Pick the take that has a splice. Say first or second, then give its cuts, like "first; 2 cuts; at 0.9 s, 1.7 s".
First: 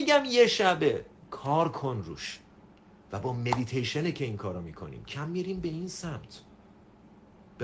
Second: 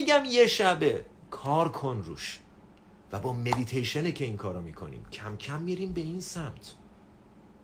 first; 1 cut; at 5.1 s